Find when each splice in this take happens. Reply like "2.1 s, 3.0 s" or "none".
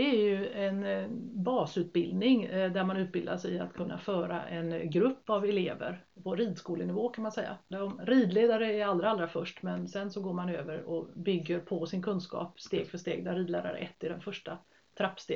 6.2 s, 7.7 s